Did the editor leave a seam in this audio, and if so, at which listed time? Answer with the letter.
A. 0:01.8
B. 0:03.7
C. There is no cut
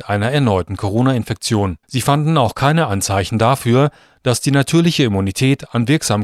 A